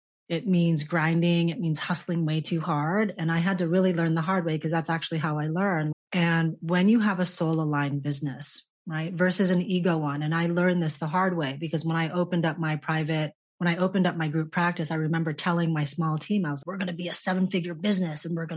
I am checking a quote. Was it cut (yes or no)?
yes